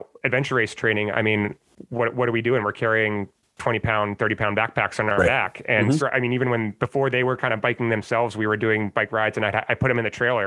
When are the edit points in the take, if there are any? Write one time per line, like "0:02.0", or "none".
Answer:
0:06.0